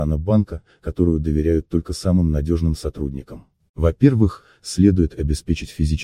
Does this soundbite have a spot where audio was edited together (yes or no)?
yes